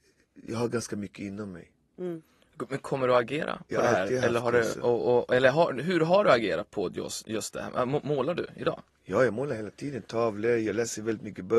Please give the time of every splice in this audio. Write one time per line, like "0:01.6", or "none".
none